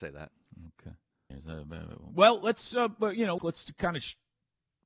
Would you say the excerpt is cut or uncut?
cut